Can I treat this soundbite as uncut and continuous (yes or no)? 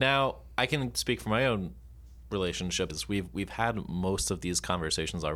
no